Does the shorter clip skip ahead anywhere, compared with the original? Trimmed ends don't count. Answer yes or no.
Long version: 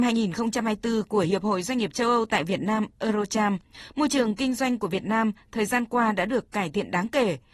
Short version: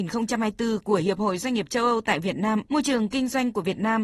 yes